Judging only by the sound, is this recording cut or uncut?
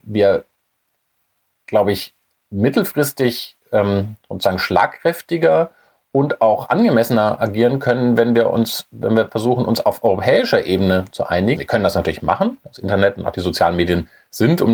cut